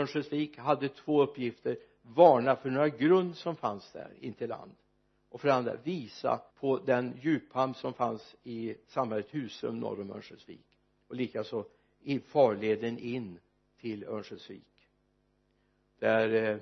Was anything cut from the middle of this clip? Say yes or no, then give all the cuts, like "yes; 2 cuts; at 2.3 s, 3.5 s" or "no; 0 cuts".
yes; 1 cut; at 6.5 s